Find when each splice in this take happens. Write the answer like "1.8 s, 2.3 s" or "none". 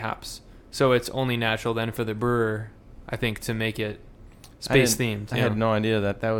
none